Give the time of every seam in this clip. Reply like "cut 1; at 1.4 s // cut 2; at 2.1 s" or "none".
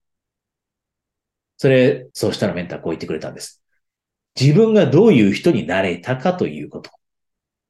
cut 1; at 2.1 s

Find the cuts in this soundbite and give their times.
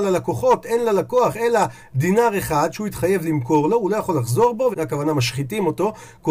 cut 1; at 4.7 s

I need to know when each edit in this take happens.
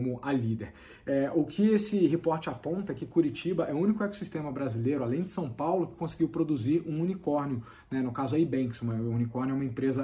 none

